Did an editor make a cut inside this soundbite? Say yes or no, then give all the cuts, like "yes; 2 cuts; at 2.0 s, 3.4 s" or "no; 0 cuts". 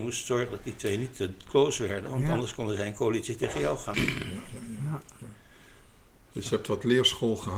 yes; 1 cut; at 3.9 s